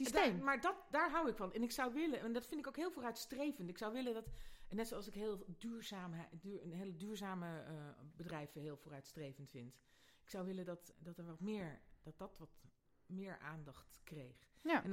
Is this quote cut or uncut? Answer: cut